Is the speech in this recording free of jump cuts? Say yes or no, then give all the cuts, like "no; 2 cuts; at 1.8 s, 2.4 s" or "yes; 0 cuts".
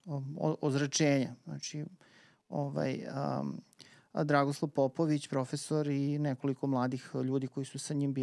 yes; 0 cuts